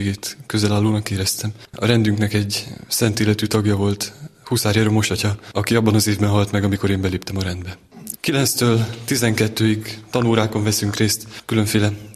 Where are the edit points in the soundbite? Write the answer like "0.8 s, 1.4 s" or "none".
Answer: 8.1 s